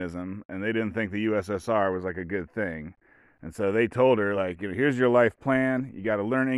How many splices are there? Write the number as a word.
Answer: zero